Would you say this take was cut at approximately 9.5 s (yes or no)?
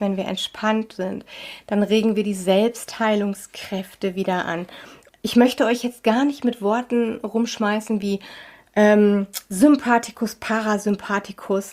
no